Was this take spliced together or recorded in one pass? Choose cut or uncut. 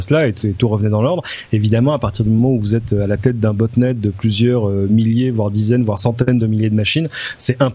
uncut